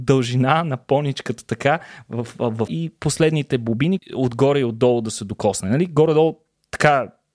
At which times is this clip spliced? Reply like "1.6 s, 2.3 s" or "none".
2.7 s, 4.0 s